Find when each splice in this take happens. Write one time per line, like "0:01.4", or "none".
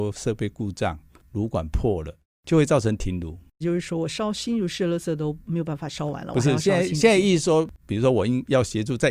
none

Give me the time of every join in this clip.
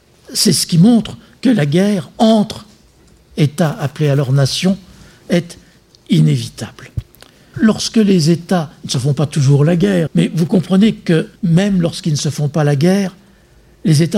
0:07.5
0:10.1
0:11.4

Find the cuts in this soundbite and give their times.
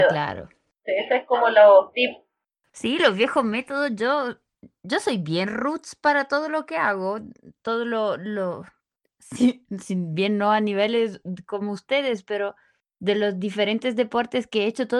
none

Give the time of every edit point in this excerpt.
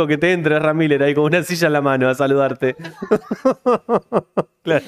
none

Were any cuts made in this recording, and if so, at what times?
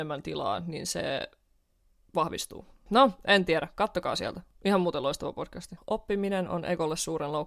0:02.9
0:05.8

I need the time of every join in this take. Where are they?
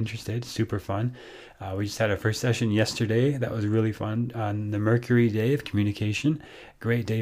none

